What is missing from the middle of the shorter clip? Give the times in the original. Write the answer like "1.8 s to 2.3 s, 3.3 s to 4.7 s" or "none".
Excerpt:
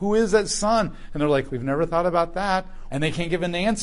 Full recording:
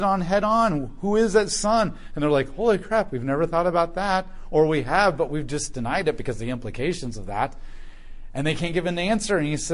2.5 s to 3.1 s, 4.5 s to 8.3 s

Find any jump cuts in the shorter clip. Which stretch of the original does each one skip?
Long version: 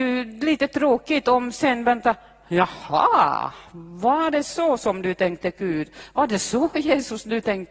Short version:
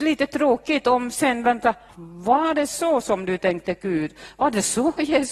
2.3 s to 3.7 s

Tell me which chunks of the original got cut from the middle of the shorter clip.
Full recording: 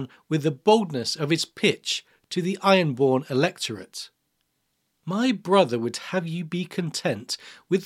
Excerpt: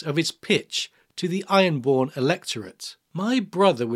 4.2 s to 5.0 s

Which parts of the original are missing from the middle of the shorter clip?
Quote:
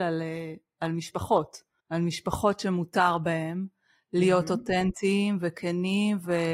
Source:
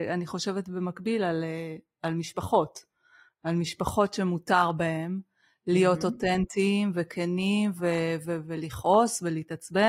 3.0 s to 3.3 s

